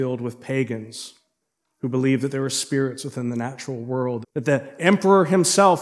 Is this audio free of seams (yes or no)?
no